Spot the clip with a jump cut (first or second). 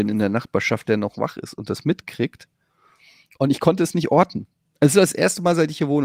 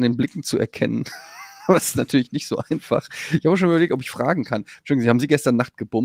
first